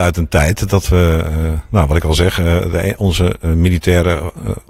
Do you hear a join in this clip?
no; 0 cuts

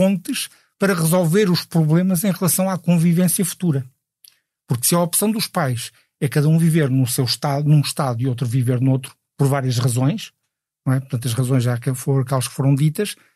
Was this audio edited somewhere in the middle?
no; 0 cuts

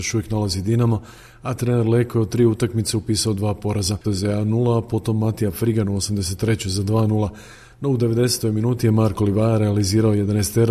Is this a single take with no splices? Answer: no; 1 cut; at 4.0 s

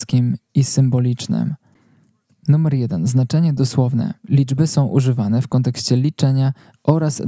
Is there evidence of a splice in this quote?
yes; 1 cut; at 4.2 s

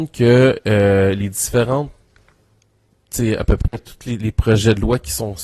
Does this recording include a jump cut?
no; 0 cuts

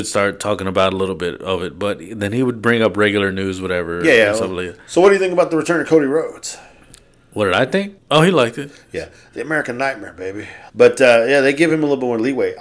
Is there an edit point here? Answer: yes; 2 cuts; at 8.0 s, 10.7 s

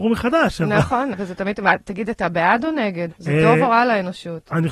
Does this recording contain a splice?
yes; 2 cuts; at 1.1 s, 3.1 s

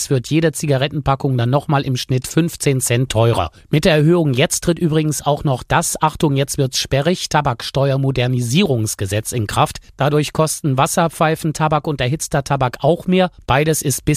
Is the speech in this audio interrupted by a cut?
no; 0 cuts

